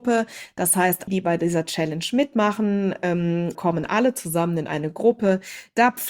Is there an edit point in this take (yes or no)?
yes